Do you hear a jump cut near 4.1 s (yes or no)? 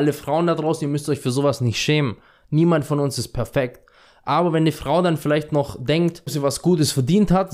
no